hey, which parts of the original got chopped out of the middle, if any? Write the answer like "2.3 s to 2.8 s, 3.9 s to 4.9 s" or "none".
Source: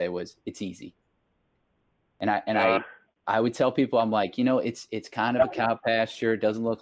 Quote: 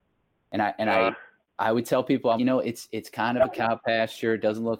4.0 s to 4.4 s